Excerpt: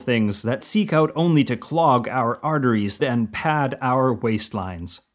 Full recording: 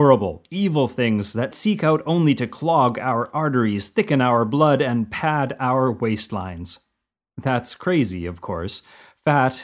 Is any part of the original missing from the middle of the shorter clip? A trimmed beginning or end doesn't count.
yes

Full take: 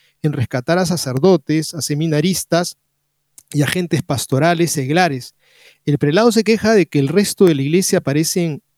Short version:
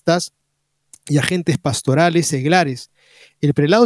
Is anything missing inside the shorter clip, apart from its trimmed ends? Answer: no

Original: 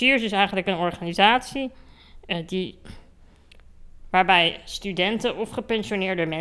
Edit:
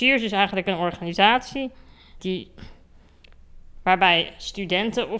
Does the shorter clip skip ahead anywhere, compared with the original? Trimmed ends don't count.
yes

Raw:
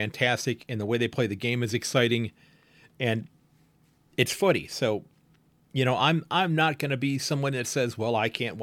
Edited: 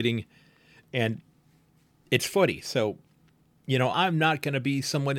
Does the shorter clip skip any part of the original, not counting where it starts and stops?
yes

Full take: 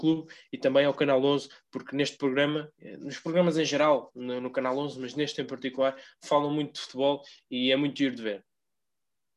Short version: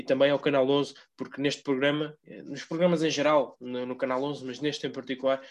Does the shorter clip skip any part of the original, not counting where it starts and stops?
no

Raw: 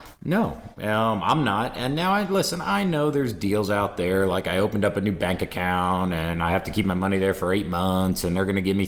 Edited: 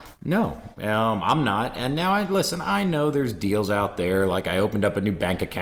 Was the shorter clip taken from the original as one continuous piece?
yes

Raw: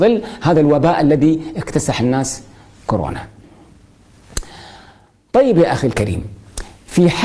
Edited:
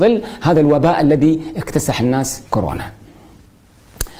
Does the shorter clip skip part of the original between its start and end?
yes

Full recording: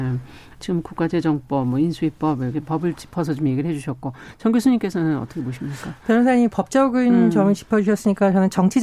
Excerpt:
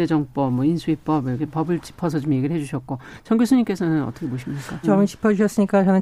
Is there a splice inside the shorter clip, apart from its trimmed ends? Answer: yes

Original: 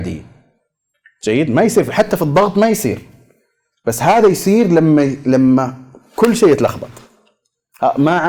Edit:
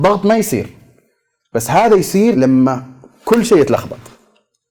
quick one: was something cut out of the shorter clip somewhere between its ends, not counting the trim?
yes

